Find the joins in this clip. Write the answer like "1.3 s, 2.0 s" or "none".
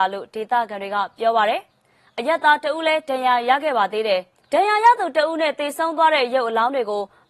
none